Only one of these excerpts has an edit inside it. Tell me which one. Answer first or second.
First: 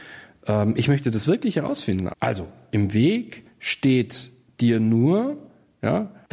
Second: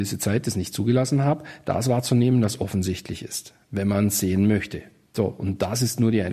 first